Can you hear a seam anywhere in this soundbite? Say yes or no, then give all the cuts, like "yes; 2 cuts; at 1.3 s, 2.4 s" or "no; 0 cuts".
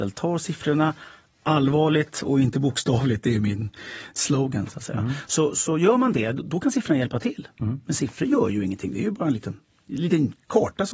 no; 0 cuts